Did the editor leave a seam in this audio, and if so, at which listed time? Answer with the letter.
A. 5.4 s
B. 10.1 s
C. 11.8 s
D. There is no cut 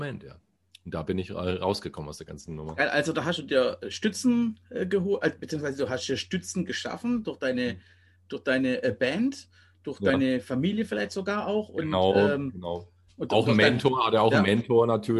A